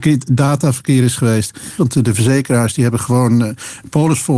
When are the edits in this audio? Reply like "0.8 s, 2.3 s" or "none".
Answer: 1.8 s